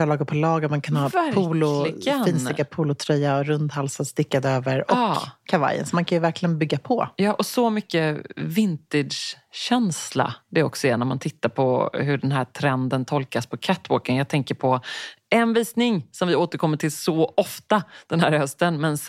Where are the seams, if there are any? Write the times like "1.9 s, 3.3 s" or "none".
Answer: none

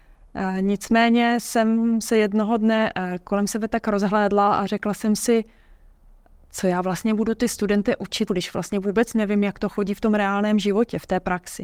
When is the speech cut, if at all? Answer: 8.3 s

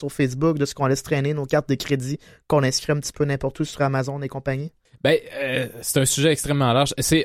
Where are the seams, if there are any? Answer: none

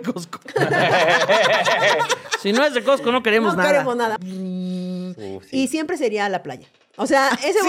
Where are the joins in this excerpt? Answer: 4.2 s

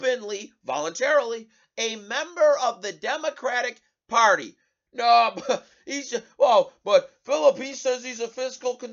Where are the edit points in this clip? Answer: 4.9 s

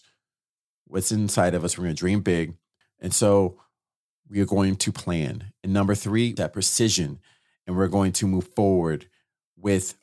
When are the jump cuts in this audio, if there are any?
2.8 s, 6.4 s

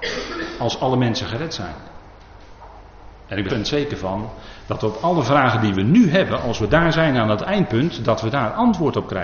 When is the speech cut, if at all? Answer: 3.5 s

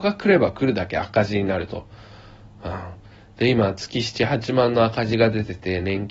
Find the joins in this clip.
none

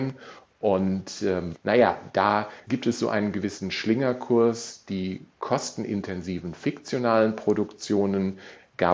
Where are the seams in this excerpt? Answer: 1.5 s

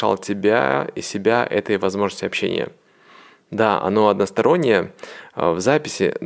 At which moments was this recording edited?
none

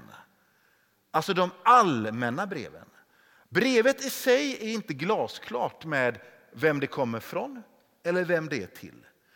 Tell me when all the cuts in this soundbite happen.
none

